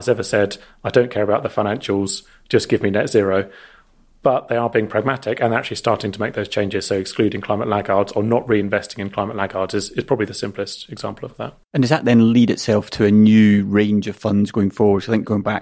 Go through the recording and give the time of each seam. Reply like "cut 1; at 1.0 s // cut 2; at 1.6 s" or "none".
cut 1; at 11.6 s